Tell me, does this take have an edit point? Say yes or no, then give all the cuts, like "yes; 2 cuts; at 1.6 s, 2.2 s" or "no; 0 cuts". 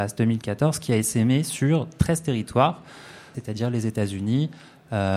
yes; 1 cut; at 3.3 s